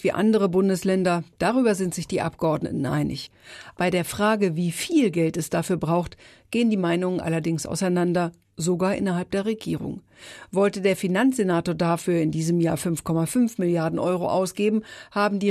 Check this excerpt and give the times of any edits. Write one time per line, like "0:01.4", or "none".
0:03.7